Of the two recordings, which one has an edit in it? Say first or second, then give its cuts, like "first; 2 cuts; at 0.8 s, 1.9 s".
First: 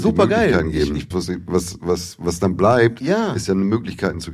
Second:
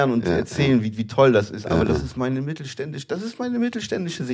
first; 1 cut; at 1.1 s